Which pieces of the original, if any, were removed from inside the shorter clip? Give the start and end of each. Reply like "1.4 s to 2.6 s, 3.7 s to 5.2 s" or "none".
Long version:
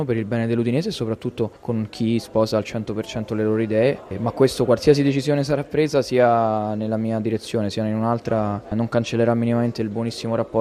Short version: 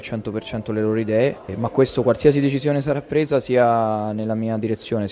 none